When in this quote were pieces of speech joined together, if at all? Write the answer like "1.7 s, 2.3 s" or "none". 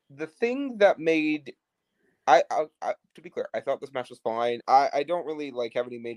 4.6 s